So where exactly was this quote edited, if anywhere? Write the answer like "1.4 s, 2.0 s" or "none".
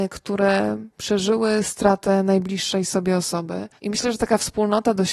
3.8 s